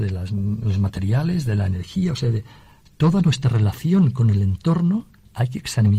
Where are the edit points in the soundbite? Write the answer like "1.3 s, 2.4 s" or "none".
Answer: none